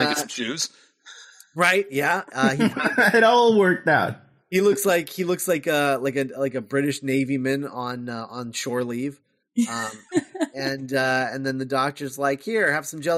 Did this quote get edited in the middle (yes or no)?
no